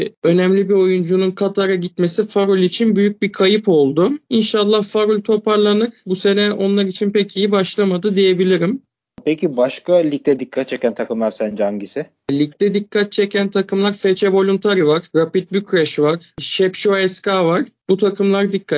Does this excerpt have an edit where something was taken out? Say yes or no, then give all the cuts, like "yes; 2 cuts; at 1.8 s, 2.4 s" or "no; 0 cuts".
no; 0 cuts